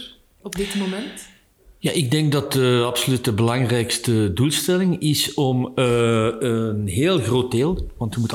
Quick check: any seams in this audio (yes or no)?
no